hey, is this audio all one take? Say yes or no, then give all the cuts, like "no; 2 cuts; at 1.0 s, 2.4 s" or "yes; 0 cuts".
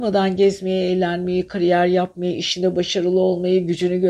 yes; 0 cuts